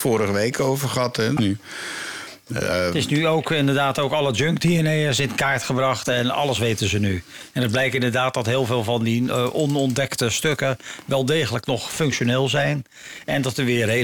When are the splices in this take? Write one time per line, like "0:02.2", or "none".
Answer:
0:01.4